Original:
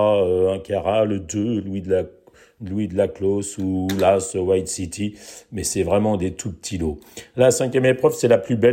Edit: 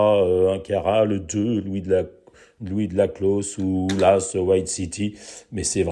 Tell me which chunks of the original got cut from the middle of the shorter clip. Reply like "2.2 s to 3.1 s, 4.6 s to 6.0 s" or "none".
none